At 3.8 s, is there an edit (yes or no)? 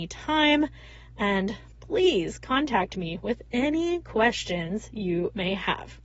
no